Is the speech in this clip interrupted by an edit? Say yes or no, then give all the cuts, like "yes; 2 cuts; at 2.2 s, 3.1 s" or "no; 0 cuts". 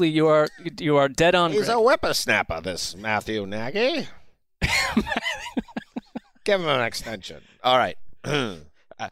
no; 0 cuts